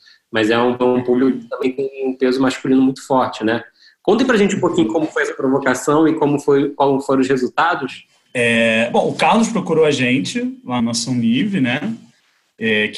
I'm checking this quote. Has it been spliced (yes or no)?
yes